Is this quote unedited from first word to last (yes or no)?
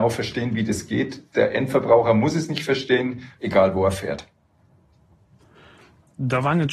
no